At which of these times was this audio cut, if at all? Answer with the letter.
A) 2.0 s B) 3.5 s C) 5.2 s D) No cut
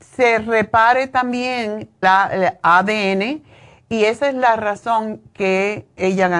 A